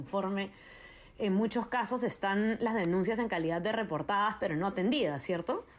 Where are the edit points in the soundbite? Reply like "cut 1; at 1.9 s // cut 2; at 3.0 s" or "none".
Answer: none